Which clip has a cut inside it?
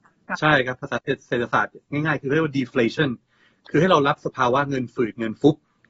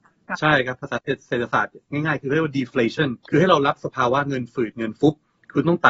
second; 1 cut; at 3.2 s

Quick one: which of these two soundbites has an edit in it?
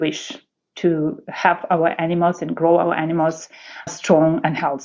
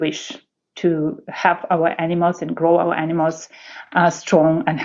first; 1 cut; at 3.9 s

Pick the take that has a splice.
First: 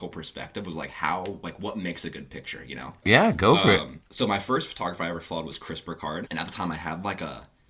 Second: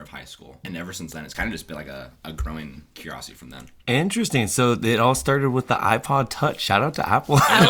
first; 2 cuts; at 3.0 s, 6.2 s

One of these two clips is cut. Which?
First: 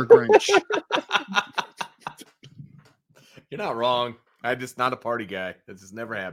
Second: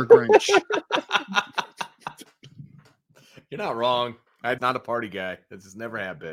second; 1 cut; at 4.6 s

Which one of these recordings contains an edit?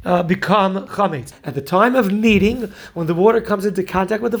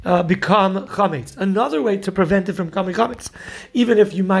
first; 1 cut; at 1.3 s

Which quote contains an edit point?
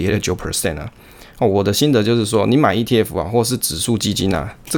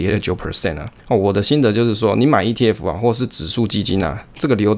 second; 1 cut; at 1.0 s

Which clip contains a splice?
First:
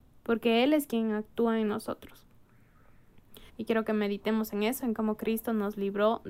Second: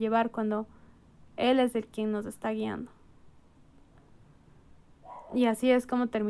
first; 1 cut; at 3.5 s

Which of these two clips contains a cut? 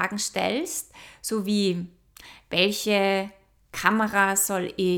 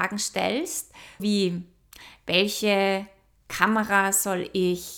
second; 1 cut; at 1.2 s

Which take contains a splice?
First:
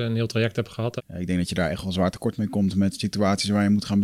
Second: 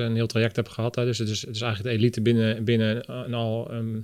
first; 1 cut; at 1.0 s

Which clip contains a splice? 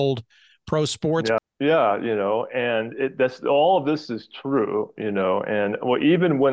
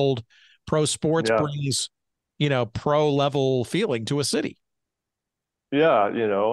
first; 1 cut; at 1.4 s

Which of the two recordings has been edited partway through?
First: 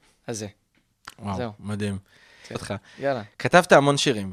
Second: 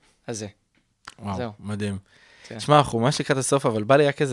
first; 1 cut; at 2.5 s

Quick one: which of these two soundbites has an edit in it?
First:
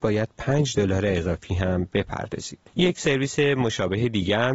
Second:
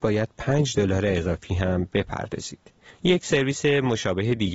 first; 1 cut; at 2.7 s

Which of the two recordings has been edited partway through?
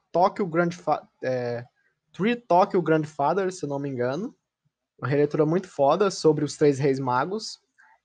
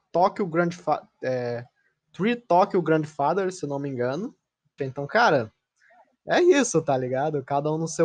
second; 1 cut; at 4.8 s

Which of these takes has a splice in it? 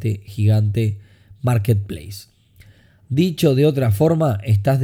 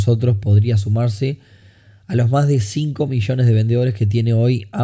first; 1 cut; at 3.0 s

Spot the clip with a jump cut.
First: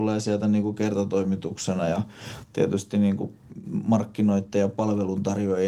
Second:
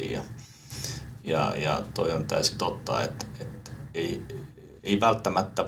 second; 1 cut; at 4.8 s

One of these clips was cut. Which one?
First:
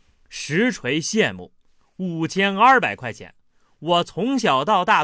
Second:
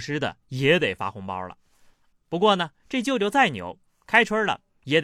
second; 1 cut; at 2.1 s

